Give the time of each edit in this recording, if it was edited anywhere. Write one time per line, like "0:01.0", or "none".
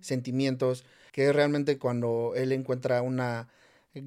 0:01.1